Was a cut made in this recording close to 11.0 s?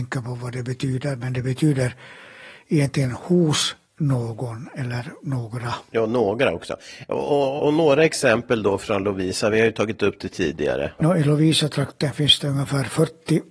yes; 2 cuts; at 7.6 s, 11.0 s

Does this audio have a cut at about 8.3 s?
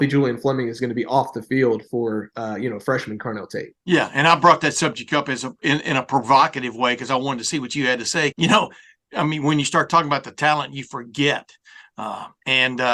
yes; 1 cut; at 8.3 s

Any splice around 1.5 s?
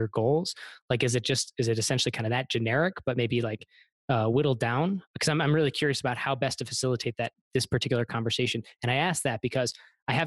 no; 0 cuts

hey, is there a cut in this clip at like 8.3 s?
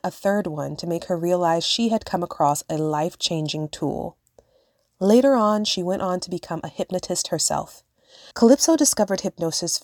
yes; 1 cut; at 8.3 s

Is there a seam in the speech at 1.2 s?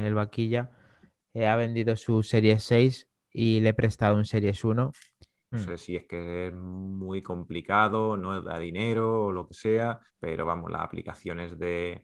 no; 2 cuts; at 5.5 s, 10.1 s

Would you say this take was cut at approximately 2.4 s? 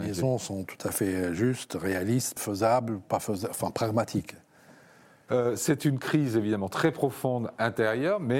yes; 2 cuts; at 2.4 s, 5.3 s

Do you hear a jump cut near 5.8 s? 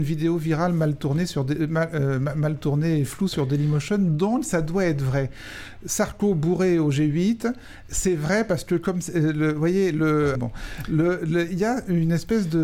no; 2 cuts; at 10.3 s, 11.5 s

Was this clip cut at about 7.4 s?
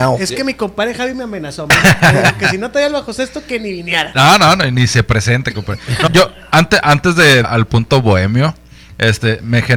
yes; 2 cuts; at 6.1 s, 7.4 s

